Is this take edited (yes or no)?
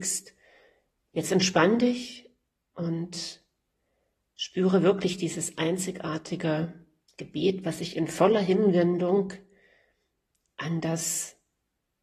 yes